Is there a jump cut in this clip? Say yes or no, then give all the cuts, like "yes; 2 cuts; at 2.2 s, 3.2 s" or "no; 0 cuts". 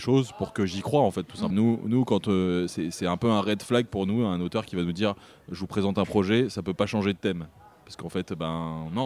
yes; 1 cut; at 1.5 s